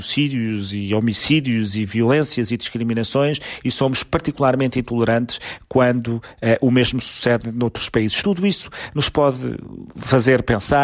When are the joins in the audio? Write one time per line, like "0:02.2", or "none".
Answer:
none

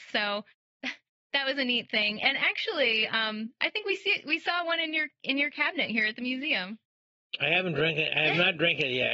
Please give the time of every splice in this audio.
none

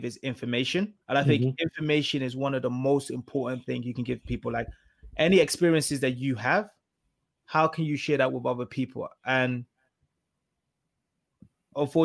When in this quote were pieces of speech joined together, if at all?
0:01.0

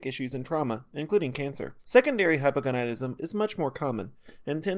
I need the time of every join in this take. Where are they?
0:01.8
0:03.2

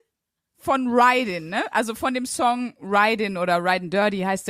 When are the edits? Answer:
none

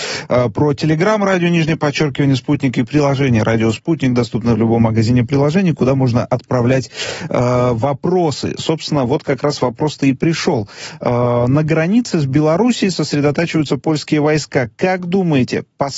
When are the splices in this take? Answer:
none

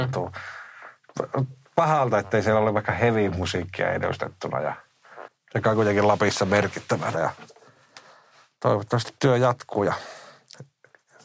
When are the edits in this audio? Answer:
0:07.1

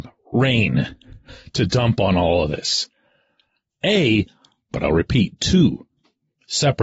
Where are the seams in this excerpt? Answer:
0:04.7

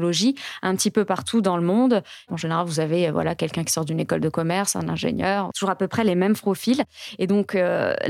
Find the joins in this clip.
0:02.3
0:05.5

